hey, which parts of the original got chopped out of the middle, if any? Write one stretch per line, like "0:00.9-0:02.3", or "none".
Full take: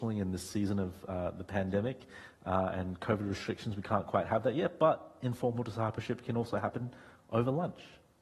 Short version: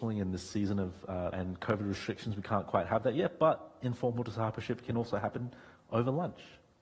0:01.3-0:02.7